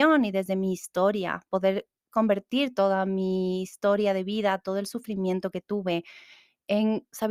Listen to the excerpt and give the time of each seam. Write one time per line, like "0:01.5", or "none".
none